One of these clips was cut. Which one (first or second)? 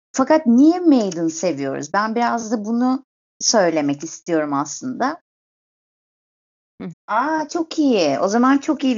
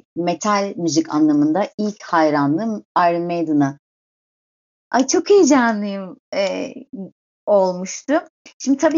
first